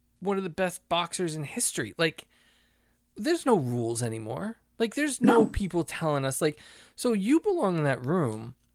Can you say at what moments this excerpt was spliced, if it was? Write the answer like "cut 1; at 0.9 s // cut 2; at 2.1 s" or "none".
none